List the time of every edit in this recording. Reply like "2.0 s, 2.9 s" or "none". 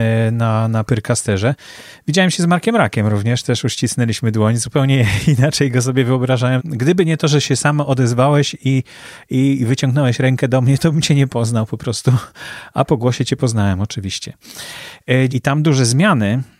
6.6 s, 15.3 s